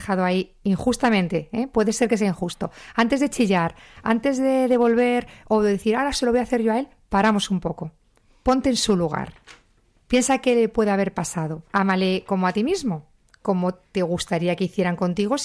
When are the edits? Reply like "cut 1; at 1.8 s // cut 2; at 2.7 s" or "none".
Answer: cut 1; at 11.7 s